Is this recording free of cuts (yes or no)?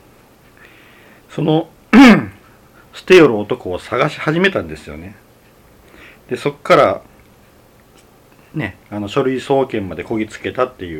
yes